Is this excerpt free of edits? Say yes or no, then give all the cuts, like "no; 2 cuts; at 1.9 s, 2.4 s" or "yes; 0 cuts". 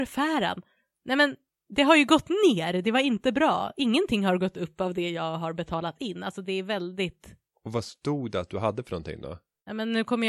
yes; 0 cuts